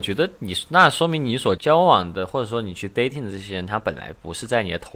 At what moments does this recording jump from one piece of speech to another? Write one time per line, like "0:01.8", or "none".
0:01.6